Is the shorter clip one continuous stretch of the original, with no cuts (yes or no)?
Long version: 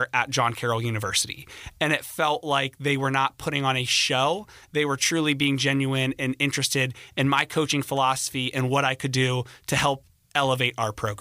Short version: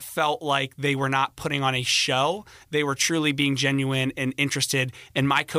yes